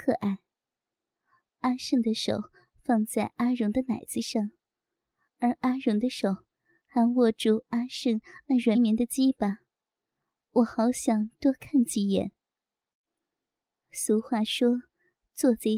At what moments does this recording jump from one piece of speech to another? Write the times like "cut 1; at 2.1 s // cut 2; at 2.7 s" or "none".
cut 1; at 8.7 s